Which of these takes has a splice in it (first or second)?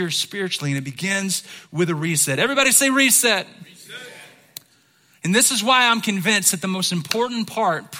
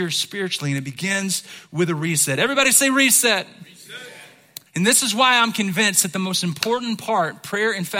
second